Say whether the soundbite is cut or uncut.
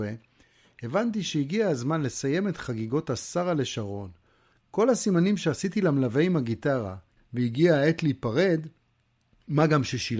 cut